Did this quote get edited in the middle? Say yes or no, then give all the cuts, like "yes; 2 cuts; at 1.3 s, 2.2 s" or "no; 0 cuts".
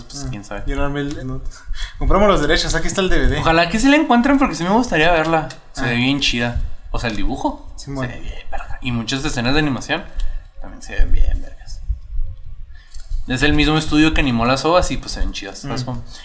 yes; 1 cut; at 1.2 s